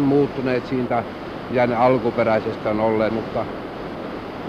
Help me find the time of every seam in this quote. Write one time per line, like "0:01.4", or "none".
0:03.1